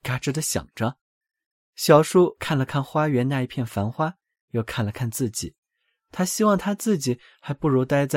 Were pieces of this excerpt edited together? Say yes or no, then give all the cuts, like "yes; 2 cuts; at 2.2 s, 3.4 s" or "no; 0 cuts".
yes; 1 cut; at 4.4 s